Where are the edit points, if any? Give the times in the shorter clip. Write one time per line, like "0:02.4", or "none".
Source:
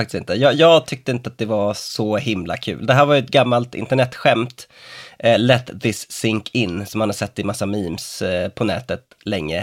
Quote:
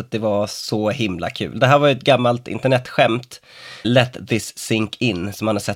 0:03.8